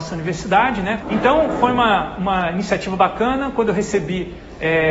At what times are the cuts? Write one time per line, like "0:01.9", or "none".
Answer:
0:01.0